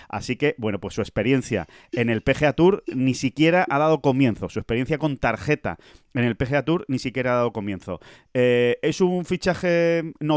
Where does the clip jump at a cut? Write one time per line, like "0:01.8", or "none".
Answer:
none